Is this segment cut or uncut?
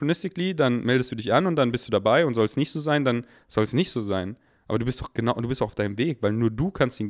uncut